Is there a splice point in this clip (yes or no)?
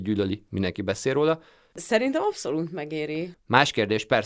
yes